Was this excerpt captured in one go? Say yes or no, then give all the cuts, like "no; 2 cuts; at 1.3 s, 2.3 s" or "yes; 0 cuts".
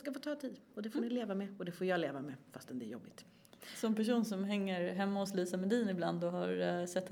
yes; 0 cuts